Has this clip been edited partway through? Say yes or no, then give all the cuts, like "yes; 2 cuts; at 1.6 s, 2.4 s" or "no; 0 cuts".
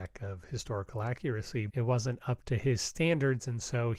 yes; 1 cut; at 1.7 s